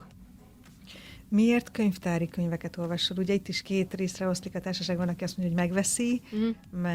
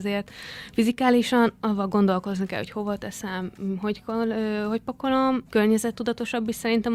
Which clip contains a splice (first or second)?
second